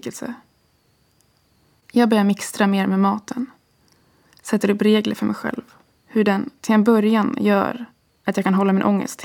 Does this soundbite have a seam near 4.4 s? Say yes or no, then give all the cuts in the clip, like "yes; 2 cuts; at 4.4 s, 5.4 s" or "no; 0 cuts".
no; 2 cuts; at 1.8 s, 5.9 s